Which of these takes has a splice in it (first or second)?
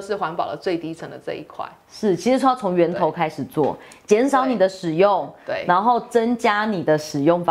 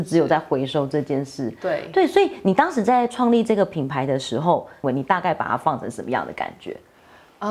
second